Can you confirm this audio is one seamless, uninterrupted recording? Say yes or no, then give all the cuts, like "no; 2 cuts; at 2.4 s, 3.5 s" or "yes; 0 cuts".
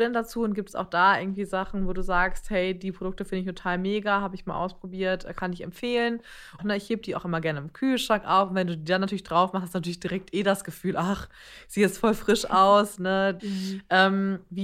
no; 2 cuts; at 6.6 s, 13.4 s